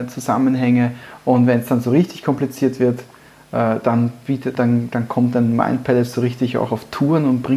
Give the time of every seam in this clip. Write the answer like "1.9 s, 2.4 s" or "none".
4.5 s